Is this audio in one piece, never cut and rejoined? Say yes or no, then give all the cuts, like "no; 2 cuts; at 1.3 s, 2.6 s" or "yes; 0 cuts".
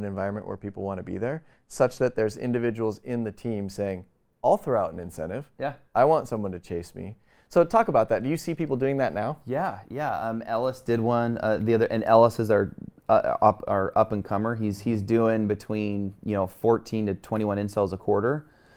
yes; 0 cuts